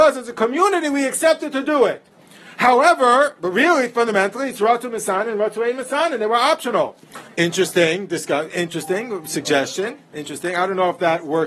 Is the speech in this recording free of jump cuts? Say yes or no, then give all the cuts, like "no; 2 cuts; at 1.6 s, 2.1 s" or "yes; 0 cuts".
no; 1 cut; at 7.3 s